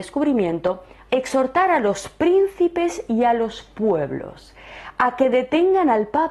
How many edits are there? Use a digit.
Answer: 1